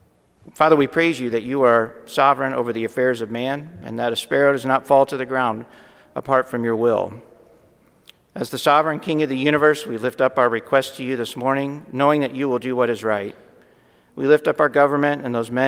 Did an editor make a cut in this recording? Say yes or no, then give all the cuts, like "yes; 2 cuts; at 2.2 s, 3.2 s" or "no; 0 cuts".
no; 0 cuts